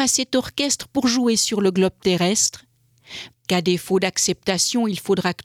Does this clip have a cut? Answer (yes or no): yes